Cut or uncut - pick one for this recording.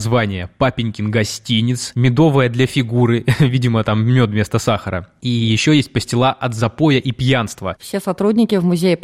cut